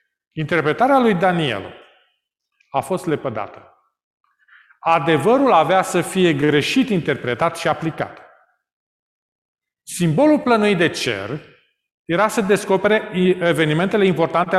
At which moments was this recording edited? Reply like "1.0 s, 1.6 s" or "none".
none